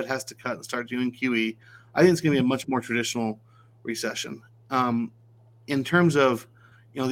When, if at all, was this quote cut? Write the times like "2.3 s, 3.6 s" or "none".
none